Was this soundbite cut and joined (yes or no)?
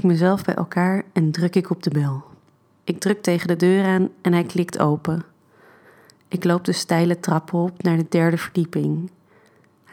yes